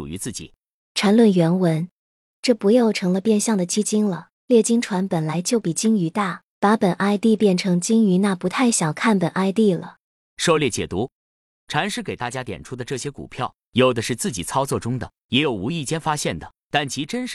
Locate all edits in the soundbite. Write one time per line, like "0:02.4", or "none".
0:02.3

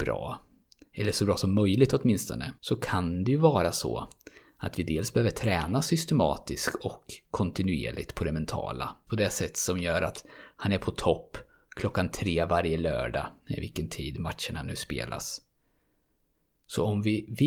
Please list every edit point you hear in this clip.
0:02.6
0:09.1

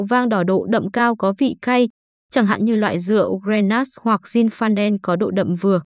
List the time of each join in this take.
0:02.2

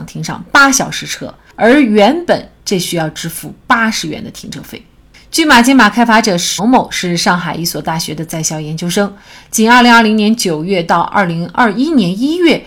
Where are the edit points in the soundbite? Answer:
0:06.6

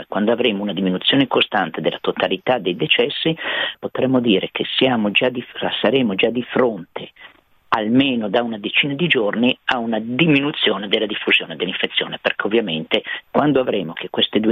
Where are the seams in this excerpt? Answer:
0:03.7
0:13.2

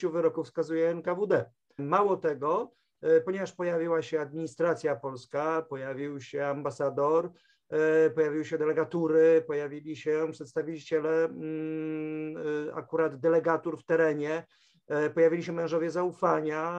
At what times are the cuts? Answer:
0:01.8

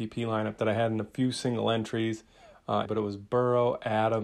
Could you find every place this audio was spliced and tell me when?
0:02.9

